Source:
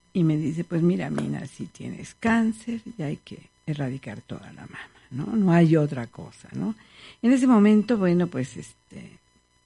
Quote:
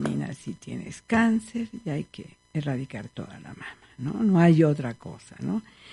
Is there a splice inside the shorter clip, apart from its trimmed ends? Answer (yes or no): no